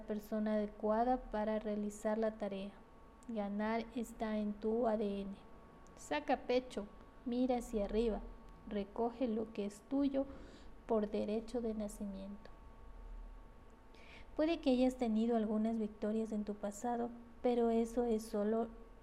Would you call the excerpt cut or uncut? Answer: uncut